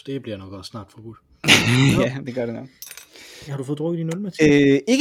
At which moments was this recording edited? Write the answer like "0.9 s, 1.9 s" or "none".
3.5 s

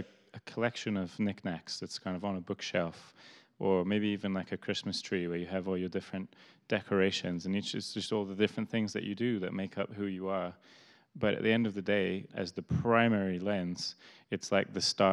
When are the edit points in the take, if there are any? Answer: 12.3 s

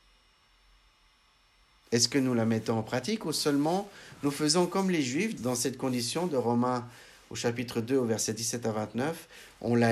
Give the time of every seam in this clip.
5.4 s

